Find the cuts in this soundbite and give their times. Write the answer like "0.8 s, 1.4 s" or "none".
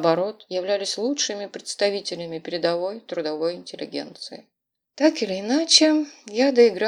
none